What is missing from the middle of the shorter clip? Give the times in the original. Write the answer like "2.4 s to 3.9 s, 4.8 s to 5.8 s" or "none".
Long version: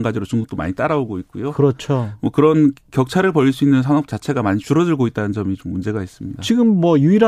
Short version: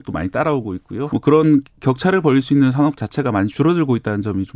1.5 s to 2.2 s